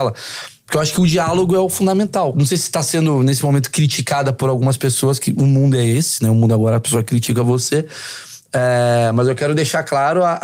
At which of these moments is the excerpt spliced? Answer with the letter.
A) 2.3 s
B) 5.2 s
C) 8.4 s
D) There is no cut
A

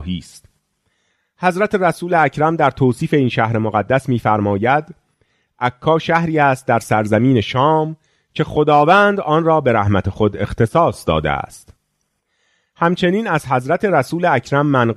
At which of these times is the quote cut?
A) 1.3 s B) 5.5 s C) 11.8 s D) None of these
D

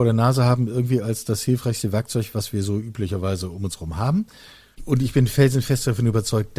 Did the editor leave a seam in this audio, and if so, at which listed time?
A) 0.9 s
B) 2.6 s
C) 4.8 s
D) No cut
C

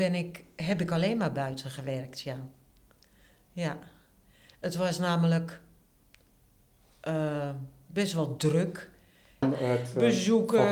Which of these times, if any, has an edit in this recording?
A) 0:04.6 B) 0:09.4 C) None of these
B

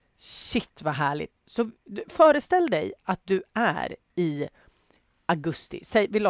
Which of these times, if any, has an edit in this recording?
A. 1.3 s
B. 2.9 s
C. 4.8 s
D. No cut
A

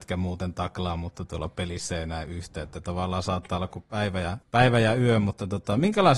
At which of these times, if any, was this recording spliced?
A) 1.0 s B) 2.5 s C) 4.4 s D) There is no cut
C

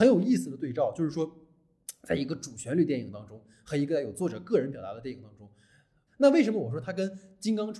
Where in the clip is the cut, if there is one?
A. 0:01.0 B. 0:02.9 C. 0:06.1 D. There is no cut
C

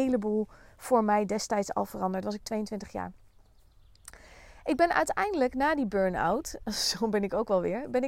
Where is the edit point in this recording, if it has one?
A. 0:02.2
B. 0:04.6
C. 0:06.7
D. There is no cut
D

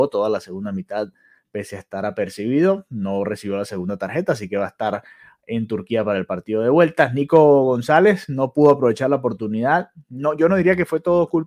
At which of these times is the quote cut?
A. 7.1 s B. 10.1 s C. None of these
C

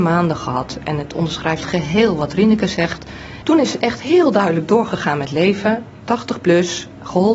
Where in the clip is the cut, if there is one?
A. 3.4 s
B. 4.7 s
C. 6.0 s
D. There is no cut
A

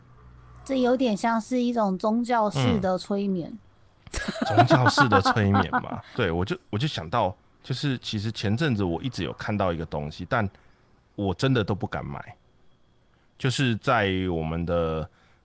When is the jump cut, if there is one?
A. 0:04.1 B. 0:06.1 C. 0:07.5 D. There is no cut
B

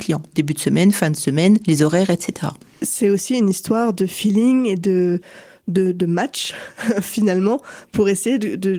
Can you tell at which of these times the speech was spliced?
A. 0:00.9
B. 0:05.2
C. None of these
C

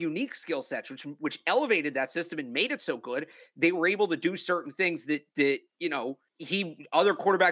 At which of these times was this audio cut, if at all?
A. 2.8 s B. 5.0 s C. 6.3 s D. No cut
C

